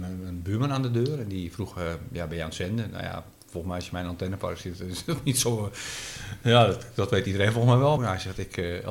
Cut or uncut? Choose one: cut